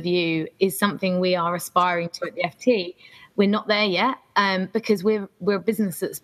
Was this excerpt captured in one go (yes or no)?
yes